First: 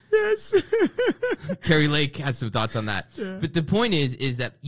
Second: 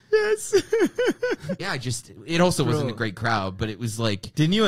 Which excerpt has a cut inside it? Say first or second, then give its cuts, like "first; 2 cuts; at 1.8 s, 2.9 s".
second; 1 cut; at 1.6 s